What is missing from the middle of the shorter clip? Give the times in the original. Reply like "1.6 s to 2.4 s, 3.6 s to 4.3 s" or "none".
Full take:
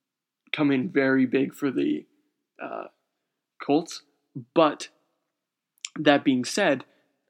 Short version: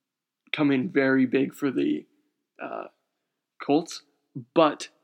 none